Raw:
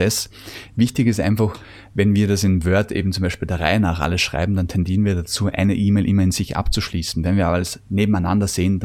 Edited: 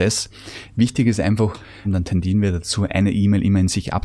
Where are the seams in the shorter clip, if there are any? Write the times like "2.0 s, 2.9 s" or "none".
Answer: 1.8 s